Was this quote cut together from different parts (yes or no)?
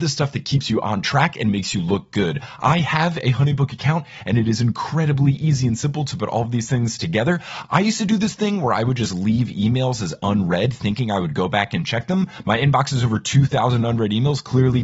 no